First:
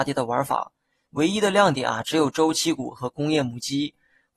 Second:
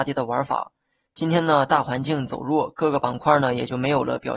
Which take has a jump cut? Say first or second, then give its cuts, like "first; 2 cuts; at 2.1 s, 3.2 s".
first; 1 cut; at 1.1 s